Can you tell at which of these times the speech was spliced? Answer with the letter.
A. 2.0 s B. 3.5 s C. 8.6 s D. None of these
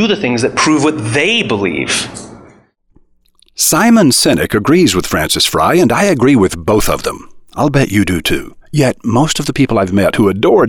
C